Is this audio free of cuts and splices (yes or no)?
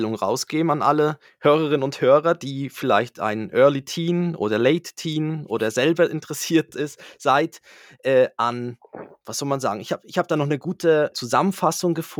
no